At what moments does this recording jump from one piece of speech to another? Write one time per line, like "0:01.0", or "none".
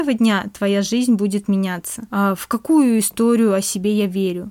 0:02.1